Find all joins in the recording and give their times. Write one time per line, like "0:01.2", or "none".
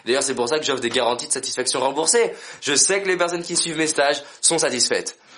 none